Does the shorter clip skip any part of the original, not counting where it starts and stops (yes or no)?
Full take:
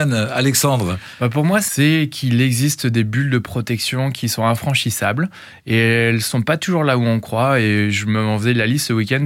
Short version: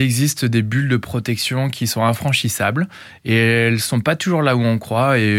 no